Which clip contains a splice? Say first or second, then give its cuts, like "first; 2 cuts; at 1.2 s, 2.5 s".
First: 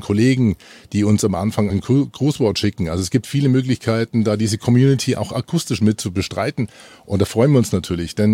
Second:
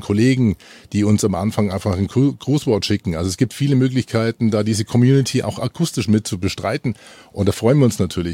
first; 1 cut; at 1.7 s